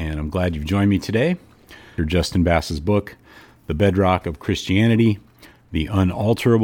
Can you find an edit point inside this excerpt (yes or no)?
yes